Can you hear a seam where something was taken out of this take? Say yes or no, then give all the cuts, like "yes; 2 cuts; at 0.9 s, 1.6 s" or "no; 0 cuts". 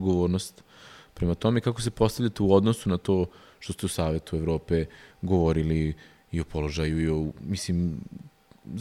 no; 0 cuts